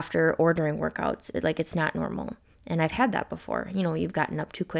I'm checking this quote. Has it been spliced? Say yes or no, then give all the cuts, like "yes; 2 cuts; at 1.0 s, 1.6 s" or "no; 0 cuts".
no; 0 cuts